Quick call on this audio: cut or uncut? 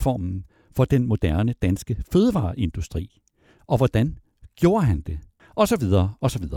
cut